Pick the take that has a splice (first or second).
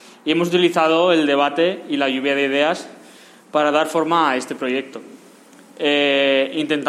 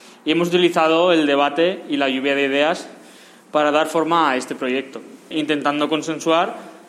second